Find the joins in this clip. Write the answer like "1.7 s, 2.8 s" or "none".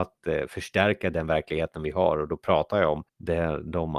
3.1 s